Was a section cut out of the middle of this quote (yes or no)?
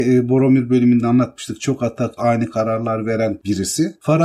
yes